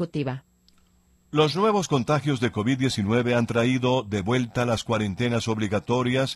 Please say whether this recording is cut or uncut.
uncut